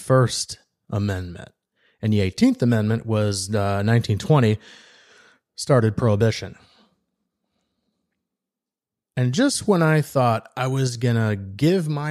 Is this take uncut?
no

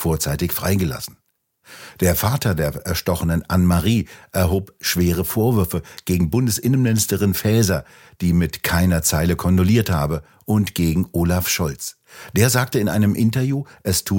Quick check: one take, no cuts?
yes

